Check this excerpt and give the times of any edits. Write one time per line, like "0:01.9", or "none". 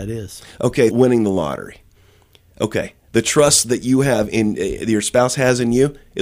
0:00.9